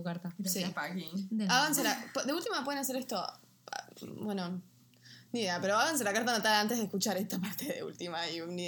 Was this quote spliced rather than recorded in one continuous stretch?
no; 0 cuts

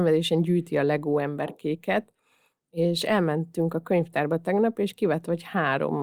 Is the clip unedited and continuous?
yes; 0 cuts

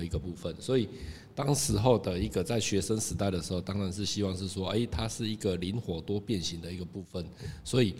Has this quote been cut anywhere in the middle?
no; 0 cuts

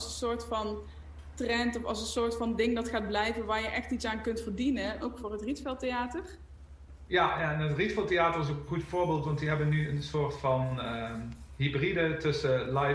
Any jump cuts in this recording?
yes; 1 cut; at 5.0 s

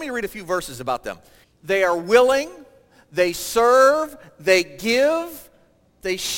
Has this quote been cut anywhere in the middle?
yes; 1 cut; at 1.4 s

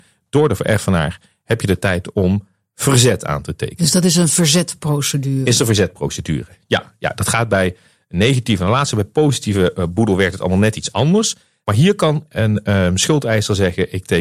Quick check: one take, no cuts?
yes; 0 cuts

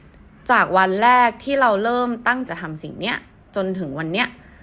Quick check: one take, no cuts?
no; 1 cut; at 2.5 s

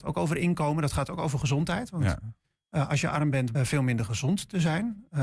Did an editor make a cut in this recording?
yes; 1 cut; at 3.5 s

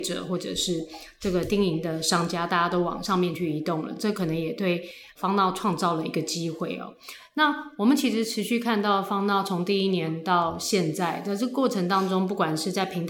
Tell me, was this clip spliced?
no; 0 cuts

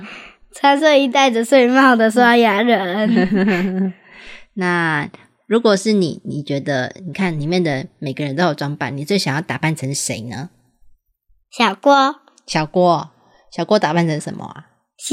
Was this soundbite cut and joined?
no; 0 cuts

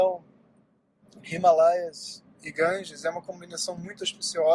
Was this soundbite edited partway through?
no; 0 cuts

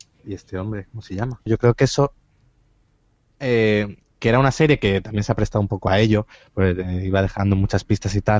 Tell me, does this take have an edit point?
yes; 1 cut; at 1.5 s

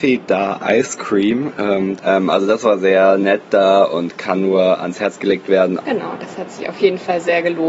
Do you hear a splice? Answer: yes; 2 cuts; at 2.0 s, 5.8 s

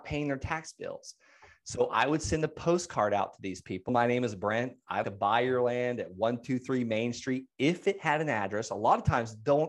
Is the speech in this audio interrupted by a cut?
yes; 2 cuts; at 3.9 s, 5.0 s

